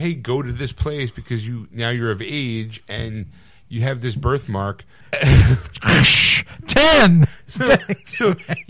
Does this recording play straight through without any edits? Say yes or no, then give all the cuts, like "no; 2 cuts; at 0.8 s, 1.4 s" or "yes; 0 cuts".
no; 1 cut; at 5.0 s